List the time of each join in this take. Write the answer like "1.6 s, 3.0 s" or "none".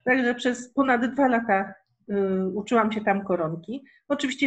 none